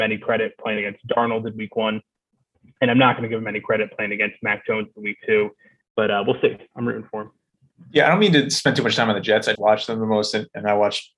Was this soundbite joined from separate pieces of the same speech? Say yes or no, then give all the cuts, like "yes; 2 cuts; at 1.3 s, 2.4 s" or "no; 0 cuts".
yes; 2 cuts; at 5.8 s, 9.6 s